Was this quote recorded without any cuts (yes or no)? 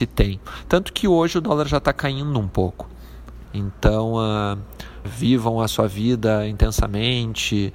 no